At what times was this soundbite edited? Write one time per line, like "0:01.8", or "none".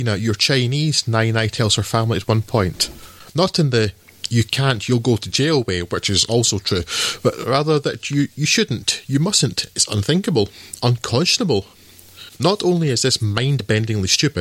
none